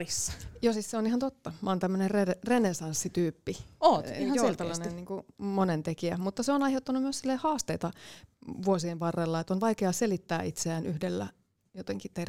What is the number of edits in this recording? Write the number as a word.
zero